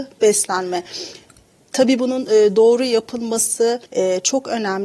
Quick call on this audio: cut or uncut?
cut